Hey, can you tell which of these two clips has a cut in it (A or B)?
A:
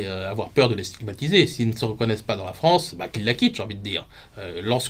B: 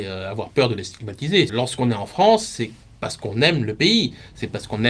B